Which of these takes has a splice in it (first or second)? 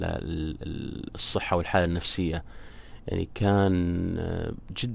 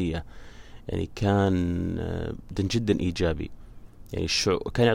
second